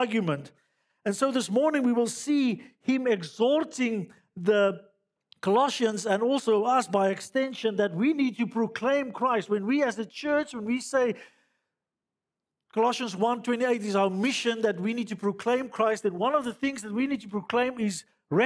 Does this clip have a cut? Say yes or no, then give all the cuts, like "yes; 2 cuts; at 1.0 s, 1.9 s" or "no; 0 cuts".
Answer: no; 0 cuts